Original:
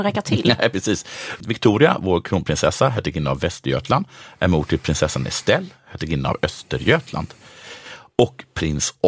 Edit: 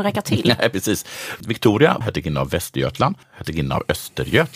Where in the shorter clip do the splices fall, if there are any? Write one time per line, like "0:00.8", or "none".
0:02.0
0:03.2